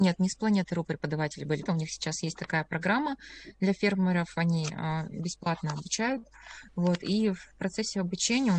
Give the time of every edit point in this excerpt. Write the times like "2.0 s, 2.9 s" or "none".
1.6 s